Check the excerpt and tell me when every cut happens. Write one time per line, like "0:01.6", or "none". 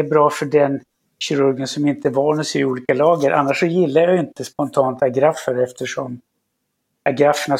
none